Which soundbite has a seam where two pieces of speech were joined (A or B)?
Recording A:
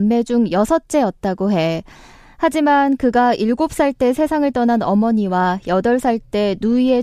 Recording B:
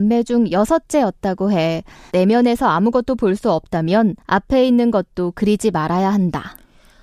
B